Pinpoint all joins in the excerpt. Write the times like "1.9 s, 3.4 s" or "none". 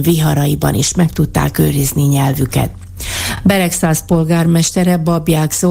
none

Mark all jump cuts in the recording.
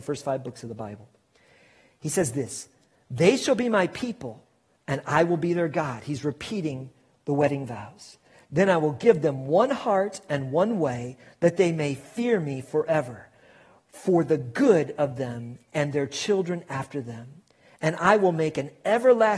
none

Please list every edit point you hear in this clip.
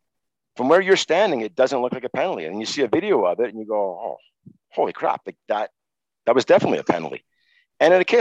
none

